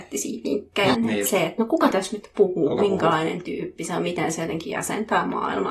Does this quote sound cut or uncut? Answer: cut